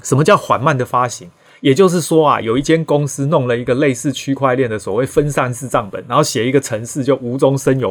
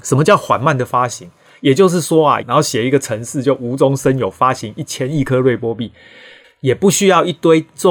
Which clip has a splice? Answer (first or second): second